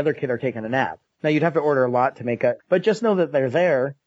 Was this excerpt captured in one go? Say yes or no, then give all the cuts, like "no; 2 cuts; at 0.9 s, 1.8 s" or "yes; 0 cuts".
no; 2 cuts; at 1.1 s, 2.6 s